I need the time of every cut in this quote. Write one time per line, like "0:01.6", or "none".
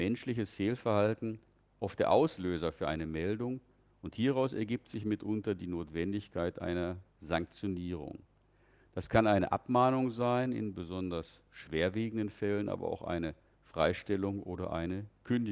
none

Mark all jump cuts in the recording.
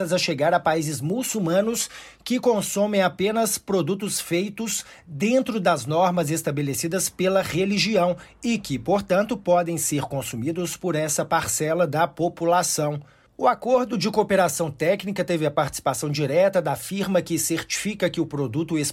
none

